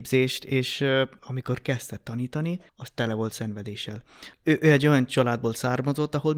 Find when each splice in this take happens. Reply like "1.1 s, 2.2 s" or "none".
1.2 s, 2.7 s, 4.3 s